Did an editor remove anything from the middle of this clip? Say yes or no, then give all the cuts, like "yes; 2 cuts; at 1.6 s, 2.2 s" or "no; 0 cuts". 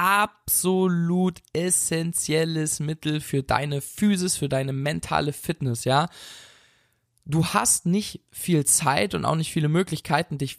no; 0 cuts